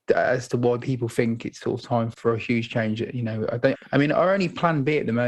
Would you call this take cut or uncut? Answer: cut